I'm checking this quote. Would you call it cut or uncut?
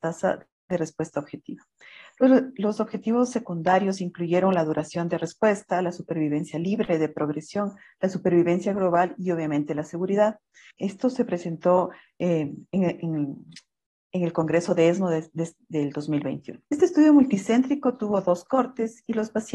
cut